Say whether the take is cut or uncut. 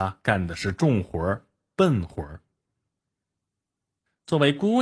uncut